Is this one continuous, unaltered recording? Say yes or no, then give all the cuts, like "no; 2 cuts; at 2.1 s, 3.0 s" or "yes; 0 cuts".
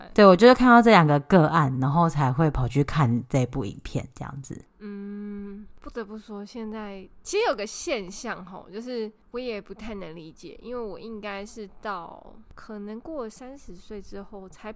yes; 0 cuts